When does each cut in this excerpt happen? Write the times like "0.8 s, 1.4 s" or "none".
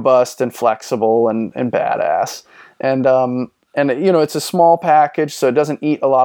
none